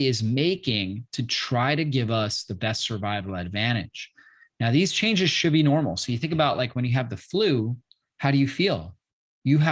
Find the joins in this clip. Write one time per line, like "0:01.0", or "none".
none

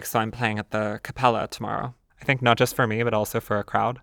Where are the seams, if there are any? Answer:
0:02.1

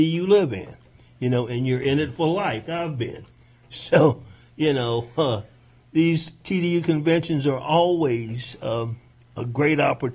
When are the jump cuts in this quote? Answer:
0:02.7

